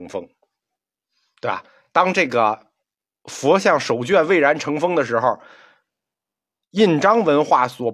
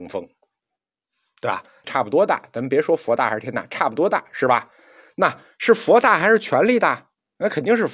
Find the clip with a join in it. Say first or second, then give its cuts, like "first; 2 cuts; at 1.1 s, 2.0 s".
second; 1 cut; at 1.8 s